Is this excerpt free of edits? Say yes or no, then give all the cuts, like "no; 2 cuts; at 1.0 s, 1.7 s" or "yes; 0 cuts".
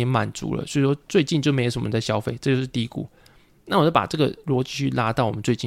yes; 0 cuts